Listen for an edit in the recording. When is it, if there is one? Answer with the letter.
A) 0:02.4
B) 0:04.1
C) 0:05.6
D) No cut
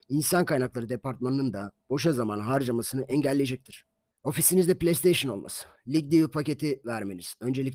B